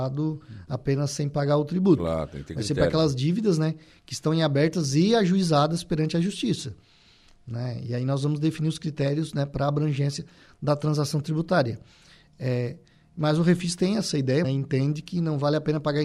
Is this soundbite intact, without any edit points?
no; 1 cut; at 14.4 s

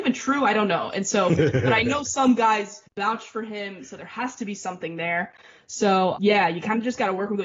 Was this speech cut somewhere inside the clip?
yes; 2 cuts; at 2.9 s, 6.2 s

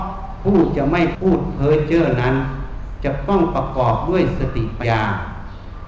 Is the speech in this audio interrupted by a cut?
yes; 1 cut; at 4.8 s

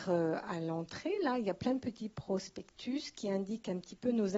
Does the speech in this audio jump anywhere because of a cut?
no; 0 cuts

